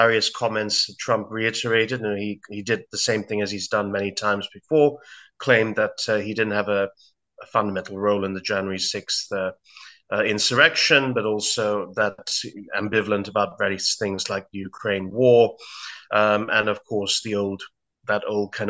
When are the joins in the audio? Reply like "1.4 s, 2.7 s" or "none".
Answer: none